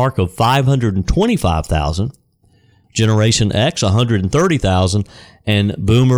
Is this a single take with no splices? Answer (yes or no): no